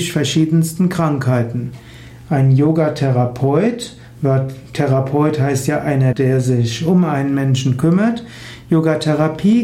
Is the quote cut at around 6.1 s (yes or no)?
yes